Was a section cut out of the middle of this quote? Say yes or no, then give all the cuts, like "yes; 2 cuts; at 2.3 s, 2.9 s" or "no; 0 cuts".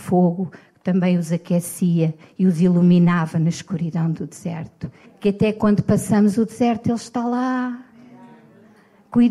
yes; 1 cut; at 5.0 s